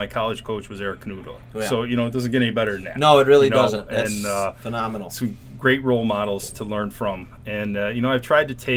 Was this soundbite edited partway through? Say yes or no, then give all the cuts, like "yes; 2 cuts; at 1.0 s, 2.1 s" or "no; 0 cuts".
no; 0 cuts